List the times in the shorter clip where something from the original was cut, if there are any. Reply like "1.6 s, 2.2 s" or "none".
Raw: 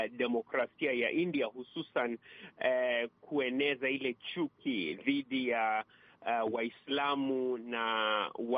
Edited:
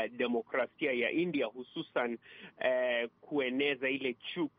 none